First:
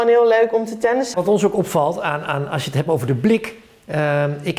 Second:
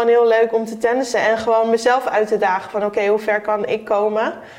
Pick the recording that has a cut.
first; 1 cut; at 1.1 s

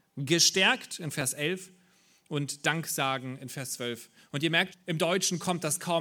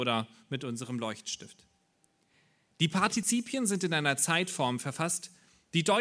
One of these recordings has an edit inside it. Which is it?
first; 1 cut; at 4.7 s

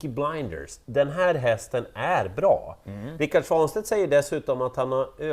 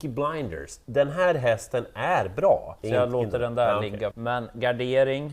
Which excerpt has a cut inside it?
second; 2 cuts; at 2.8 s, 4.1 s

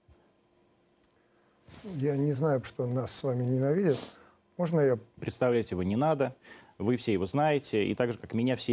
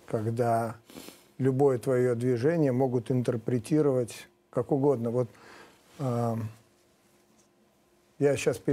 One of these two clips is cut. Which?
first; 2 cuts; at 2.6 s, 5.2 s

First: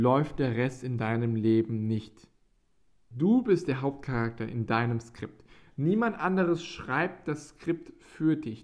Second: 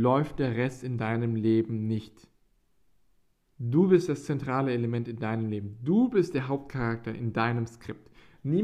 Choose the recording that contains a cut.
first; 1 cut; at 3.1 s

